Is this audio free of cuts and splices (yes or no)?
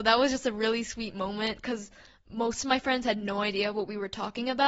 yes